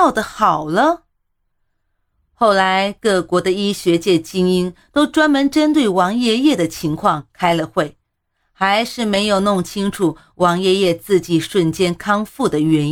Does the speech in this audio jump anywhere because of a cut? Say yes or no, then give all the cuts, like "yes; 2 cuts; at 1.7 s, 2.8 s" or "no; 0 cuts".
no; 0 cuts